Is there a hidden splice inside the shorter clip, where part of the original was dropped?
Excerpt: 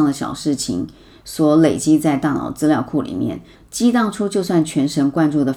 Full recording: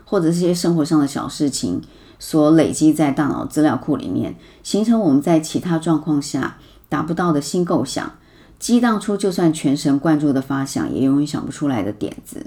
yes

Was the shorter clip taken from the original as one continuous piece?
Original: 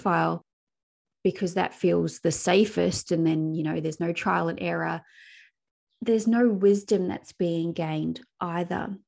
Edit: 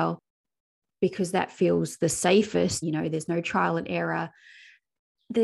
no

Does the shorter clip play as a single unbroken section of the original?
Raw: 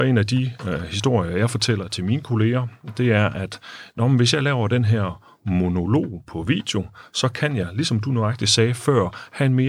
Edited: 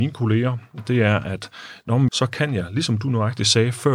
no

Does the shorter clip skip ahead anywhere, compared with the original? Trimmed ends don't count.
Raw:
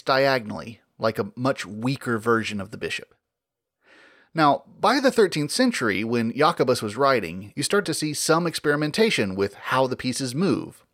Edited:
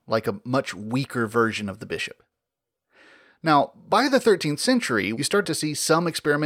yes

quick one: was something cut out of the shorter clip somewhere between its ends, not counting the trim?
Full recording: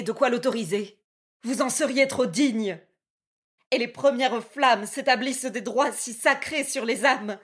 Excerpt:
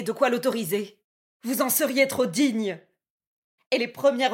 no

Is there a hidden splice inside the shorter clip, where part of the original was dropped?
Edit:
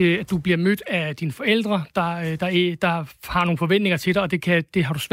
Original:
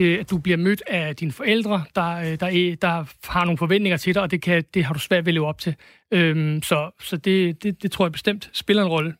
no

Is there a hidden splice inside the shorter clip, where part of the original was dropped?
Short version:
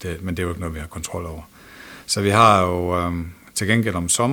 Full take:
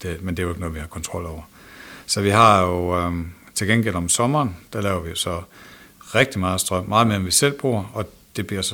no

